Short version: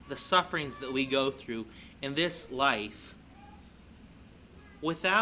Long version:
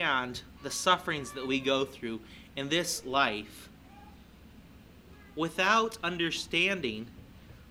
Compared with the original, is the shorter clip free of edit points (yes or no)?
yes